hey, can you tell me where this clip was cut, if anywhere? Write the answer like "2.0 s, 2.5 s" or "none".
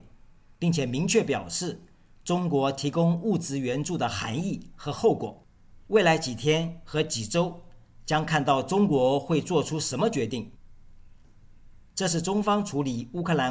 5.7 s, 11.2 s